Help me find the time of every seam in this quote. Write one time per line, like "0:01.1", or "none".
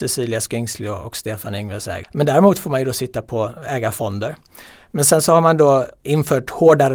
0:02.0